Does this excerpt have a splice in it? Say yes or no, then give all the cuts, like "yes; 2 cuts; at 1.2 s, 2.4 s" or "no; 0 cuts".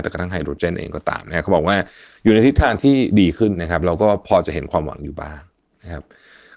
yes; 1 cut; at 3.5 s